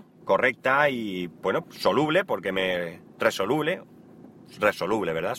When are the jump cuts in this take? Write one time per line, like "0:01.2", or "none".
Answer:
0:01.6